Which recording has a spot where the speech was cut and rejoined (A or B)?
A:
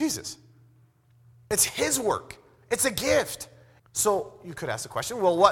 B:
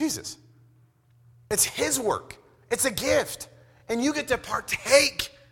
A